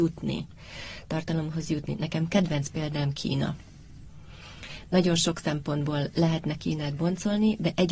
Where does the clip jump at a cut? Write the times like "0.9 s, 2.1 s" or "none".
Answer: none